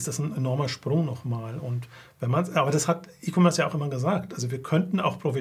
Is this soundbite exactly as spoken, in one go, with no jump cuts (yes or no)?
yes